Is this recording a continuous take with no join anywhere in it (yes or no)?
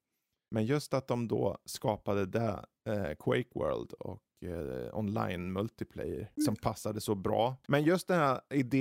no